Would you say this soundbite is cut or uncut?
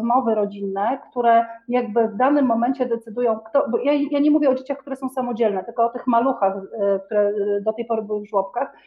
uncut